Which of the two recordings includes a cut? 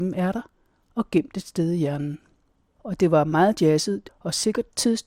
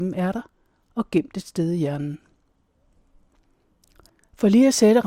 first; 2 cuts; at 2.8 s, 4.1 s

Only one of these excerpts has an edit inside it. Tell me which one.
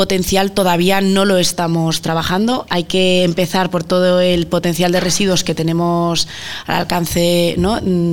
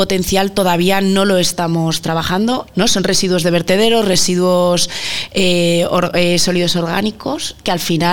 second; 1 cut; at 2.7 s

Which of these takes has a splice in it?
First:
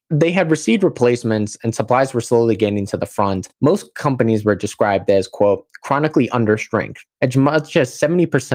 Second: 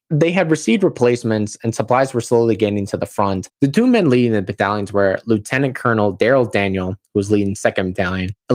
second; 1 cut; at 3.5 s

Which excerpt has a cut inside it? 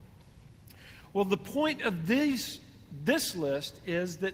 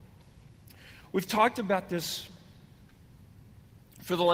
second; 1 cut; at 1.1 s

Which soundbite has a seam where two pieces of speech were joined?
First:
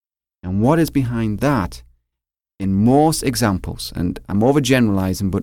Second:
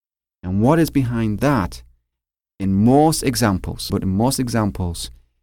second; 1 cut; at 3.9 s

